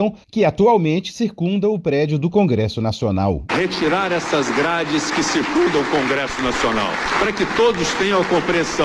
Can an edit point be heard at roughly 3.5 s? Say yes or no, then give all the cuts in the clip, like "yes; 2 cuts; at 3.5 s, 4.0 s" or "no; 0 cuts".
yes; 1 cut; at 3.5 s